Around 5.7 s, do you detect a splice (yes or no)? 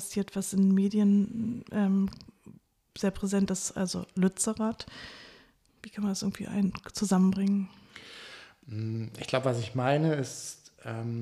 yes